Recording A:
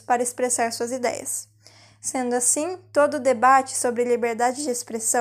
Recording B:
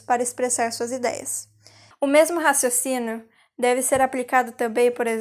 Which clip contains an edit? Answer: B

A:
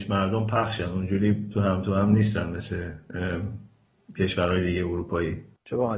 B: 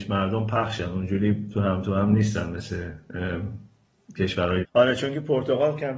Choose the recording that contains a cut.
B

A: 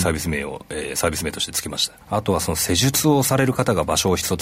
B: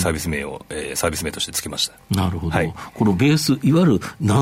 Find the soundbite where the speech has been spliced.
A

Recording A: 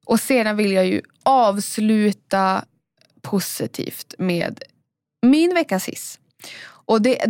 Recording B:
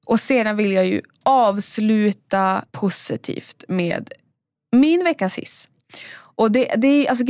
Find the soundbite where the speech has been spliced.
B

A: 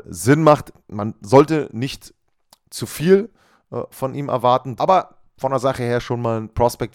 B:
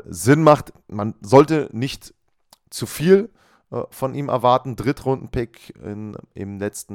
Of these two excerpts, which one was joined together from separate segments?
A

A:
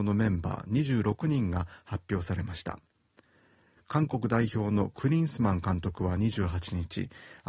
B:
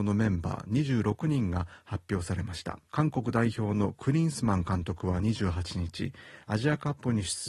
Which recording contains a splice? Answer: B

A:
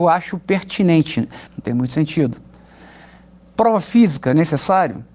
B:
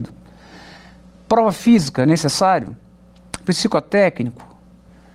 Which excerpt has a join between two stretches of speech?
A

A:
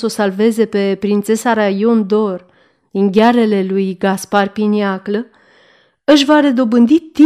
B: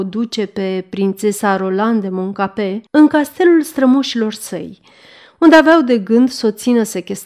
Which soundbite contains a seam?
B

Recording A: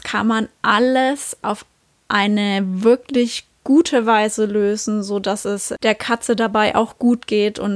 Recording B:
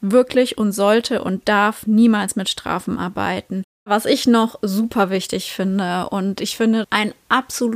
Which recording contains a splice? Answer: B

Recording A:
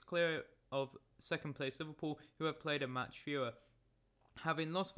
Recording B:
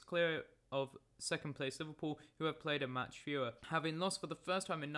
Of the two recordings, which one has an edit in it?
B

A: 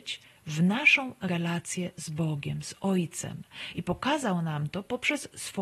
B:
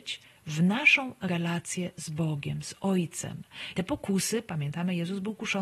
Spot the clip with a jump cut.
B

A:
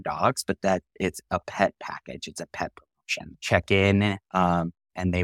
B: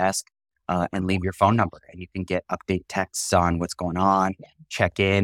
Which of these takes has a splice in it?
A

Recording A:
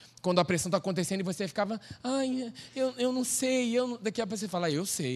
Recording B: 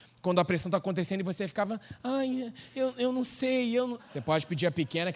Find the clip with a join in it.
B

